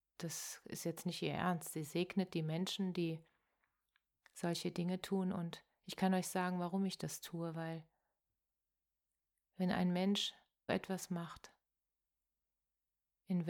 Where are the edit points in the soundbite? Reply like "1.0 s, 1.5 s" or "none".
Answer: 10.7 s